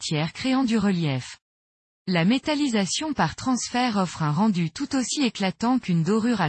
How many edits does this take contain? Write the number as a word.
one